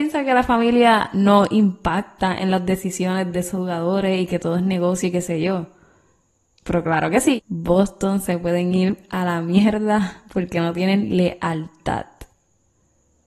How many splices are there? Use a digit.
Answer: 2